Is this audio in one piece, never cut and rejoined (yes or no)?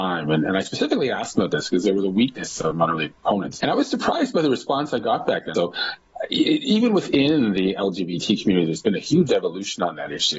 no